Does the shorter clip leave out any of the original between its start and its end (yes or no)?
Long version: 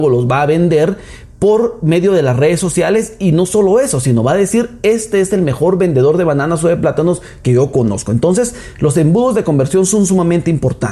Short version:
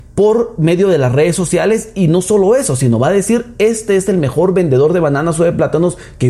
no